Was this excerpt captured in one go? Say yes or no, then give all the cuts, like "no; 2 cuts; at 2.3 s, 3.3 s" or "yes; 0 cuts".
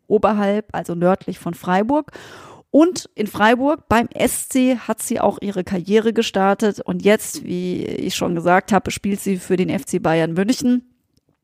yes; 0 cuts